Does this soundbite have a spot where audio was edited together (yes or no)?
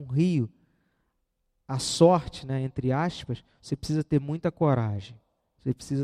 no